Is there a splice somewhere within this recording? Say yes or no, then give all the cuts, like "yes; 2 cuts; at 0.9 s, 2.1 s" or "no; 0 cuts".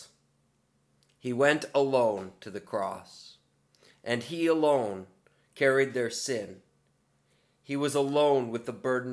no; 0 cuts